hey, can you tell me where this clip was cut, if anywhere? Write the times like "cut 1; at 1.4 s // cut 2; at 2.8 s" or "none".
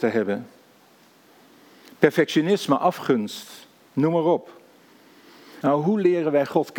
cut 1; at 5.6 s